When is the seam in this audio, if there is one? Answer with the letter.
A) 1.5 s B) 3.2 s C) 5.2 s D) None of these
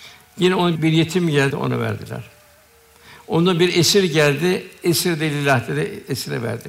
A